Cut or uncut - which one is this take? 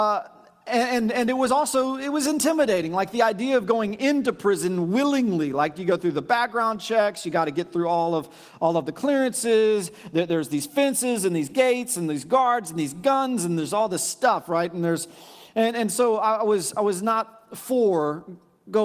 cut